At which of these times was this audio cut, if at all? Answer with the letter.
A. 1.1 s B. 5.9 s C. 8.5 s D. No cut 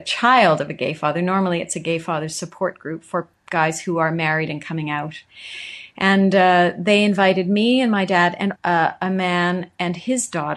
C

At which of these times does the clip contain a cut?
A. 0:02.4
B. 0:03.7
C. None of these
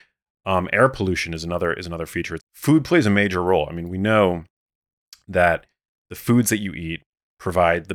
A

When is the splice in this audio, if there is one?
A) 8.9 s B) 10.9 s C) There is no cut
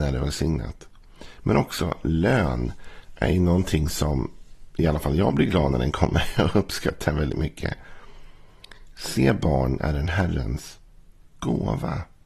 C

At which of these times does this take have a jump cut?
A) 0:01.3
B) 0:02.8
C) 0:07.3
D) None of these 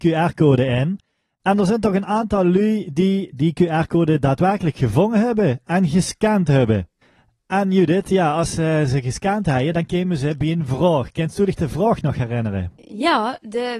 D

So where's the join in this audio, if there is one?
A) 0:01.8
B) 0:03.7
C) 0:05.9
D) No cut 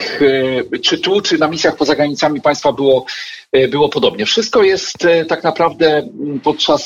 D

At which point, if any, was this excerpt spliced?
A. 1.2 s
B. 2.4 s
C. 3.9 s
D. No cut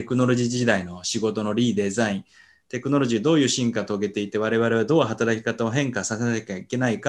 D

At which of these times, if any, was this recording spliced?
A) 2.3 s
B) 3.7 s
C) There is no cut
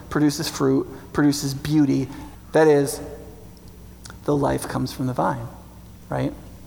A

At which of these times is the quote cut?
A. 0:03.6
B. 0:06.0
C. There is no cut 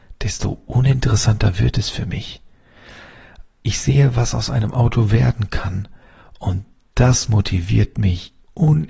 A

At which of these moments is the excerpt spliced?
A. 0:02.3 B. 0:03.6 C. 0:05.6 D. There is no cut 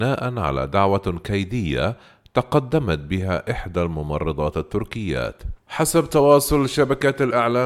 C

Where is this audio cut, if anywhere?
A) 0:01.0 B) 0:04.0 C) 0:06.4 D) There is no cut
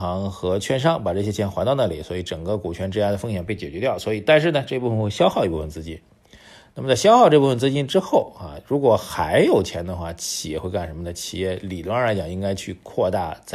D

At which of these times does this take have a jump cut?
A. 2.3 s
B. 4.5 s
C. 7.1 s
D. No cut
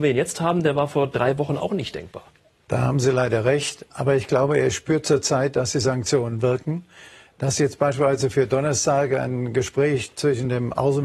D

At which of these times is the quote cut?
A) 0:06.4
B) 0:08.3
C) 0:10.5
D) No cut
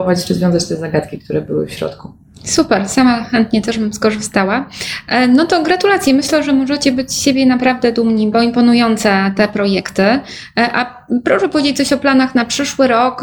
B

